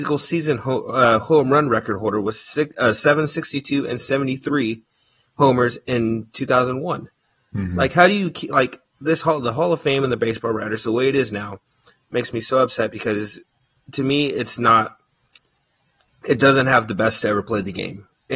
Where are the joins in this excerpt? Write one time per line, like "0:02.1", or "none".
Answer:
none